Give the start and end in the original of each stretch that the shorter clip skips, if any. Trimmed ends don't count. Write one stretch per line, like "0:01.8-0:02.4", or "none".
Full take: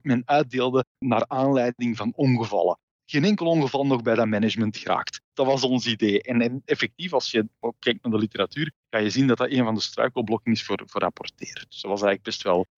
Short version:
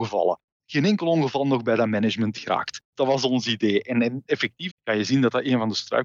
0:07.1-0:08.8